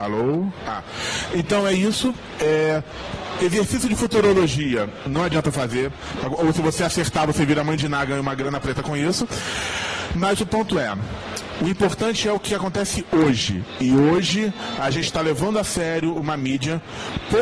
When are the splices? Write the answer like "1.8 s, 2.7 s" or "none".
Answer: 6.2 s